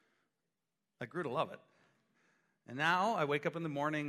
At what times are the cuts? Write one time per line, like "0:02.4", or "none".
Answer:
none